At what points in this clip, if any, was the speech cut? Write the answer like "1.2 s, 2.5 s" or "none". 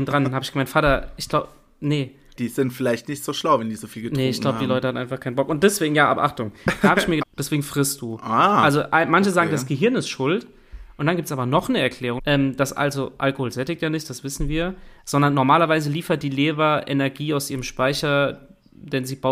2.4 s, 7.2 s, 12.2 s